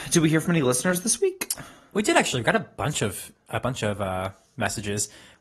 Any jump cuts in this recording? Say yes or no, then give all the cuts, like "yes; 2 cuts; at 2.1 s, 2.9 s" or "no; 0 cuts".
no; 0 cuts